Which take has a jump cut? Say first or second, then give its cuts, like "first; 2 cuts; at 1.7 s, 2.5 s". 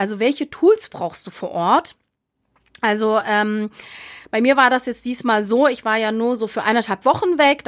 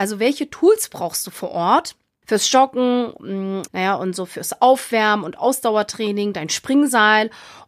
second; 2 cuts; at 2.2 s, 3.7 s